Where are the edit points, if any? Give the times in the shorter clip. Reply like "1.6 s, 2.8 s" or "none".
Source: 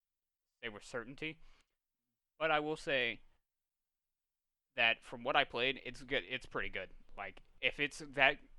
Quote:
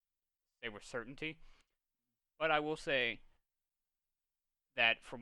none